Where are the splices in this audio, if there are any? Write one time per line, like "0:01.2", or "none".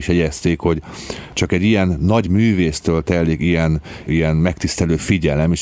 0:04.1